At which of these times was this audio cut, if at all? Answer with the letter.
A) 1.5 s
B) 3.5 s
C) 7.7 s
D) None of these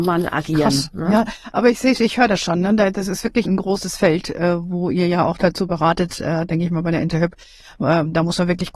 B